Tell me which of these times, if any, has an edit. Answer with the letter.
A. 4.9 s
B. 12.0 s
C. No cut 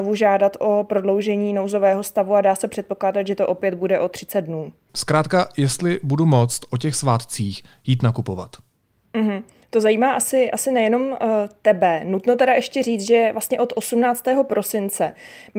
A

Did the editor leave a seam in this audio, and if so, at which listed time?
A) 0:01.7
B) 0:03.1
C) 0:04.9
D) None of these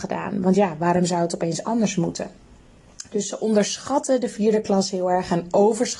D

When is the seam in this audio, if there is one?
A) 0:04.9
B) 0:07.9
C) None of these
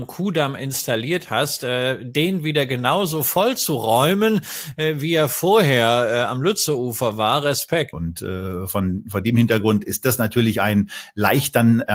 B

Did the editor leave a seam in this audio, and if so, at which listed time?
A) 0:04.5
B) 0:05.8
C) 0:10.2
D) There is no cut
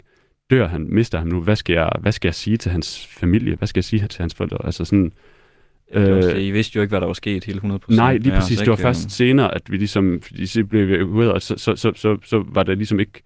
A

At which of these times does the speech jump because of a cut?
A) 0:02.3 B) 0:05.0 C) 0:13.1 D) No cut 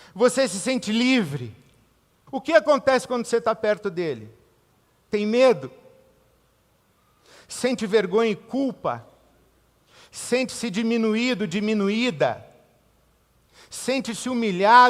A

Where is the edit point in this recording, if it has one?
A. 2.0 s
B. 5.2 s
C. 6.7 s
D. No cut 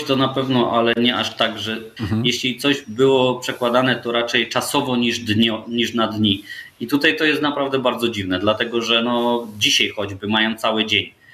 A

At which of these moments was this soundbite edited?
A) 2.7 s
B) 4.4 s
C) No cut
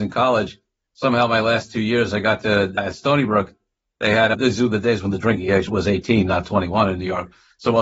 B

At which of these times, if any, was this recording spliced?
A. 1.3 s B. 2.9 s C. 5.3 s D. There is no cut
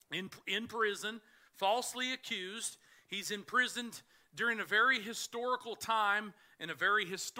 D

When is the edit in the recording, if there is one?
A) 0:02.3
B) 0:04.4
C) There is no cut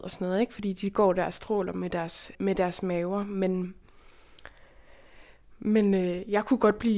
A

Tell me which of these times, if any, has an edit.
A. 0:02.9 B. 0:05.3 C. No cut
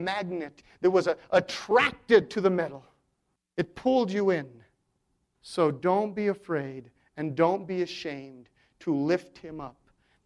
B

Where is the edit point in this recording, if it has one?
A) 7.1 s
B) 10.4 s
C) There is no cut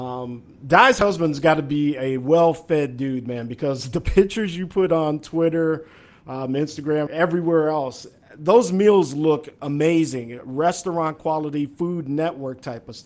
A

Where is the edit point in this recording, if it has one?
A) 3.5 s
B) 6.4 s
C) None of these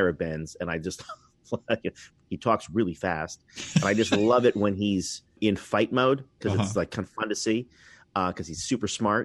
B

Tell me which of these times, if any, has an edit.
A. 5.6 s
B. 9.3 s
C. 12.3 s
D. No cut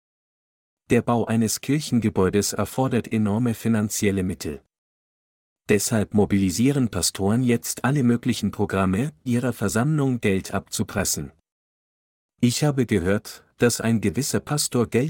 B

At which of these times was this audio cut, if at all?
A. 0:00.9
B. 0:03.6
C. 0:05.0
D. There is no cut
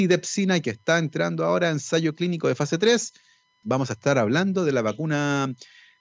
B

